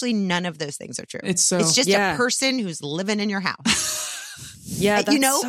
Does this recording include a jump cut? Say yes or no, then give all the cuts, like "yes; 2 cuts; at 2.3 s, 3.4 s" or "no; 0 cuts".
no; 0 cuts